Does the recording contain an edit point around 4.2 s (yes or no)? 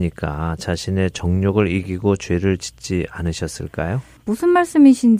yes